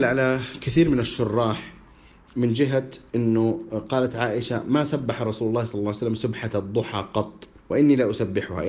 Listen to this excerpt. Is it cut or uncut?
cut